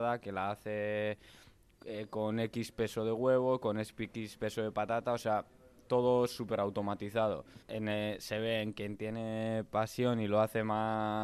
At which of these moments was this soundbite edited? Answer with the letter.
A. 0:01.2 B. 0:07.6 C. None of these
B